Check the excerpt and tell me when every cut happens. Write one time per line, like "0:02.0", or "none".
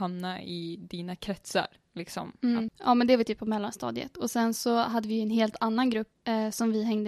0:02.7

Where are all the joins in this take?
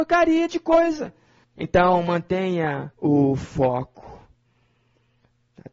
0:01.4
0:02.9

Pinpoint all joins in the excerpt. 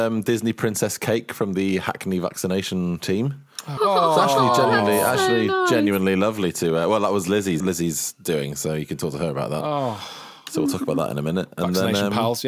0:03.8
0:07.6

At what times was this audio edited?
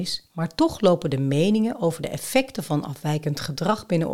none

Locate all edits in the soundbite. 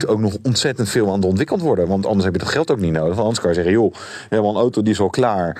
none

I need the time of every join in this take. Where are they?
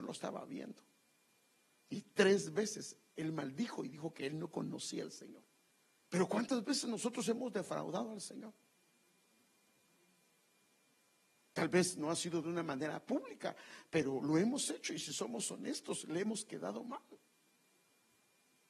0:06.0

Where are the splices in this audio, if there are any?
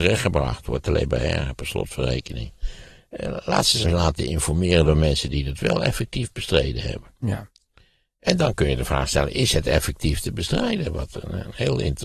0:03.8

